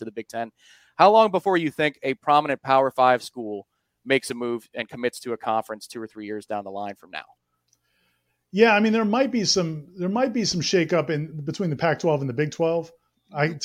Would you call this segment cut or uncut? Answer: uncut